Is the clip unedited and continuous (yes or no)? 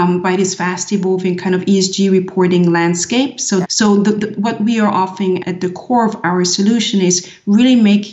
no